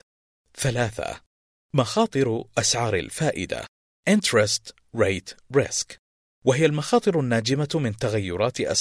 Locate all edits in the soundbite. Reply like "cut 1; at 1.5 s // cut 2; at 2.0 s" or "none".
none